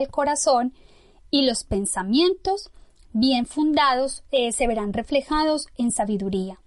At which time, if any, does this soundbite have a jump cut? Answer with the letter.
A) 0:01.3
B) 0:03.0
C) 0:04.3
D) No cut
D